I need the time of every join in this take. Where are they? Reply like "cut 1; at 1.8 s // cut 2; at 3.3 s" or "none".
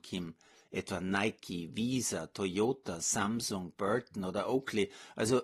none